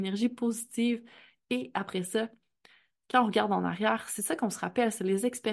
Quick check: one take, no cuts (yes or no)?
yes